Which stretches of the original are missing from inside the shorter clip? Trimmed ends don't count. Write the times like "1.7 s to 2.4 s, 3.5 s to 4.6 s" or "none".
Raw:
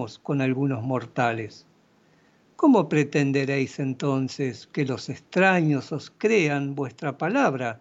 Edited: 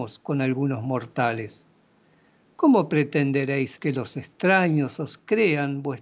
3.8 s to 4.7 s